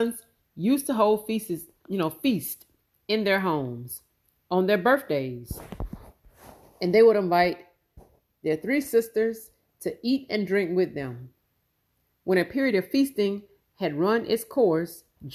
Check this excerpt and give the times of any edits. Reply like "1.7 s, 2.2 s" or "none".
none